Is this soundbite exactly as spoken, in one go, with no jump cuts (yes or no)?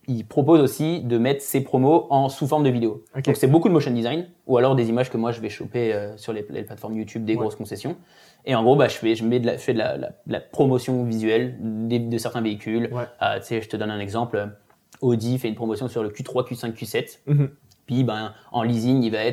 yes